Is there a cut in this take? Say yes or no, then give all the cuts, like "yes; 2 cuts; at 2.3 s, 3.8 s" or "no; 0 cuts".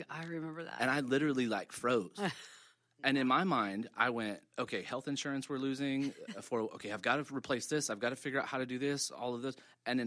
no; 0 cuts